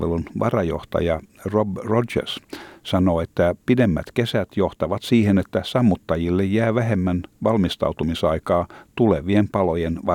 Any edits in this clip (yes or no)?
no